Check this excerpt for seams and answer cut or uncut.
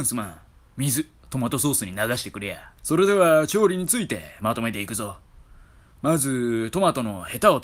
cut